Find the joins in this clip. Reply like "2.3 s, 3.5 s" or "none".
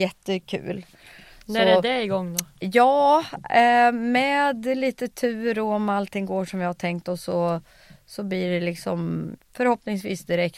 9.4 s